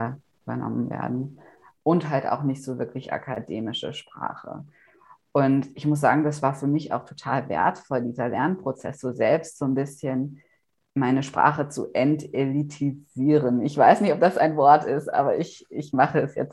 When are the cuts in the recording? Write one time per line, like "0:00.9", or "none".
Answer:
none